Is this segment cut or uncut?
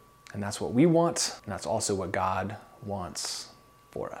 cut